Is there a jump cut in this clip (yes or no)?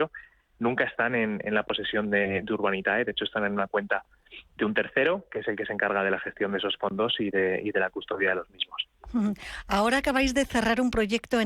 no